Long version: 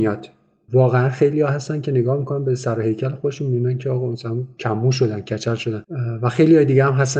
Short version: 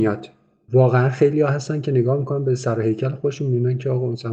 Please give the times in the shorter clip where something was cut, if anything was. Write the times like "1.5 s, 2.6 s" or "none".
none